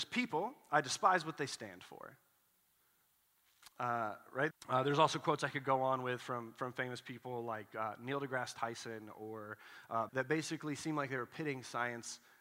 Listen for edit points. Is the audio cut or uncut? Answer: cut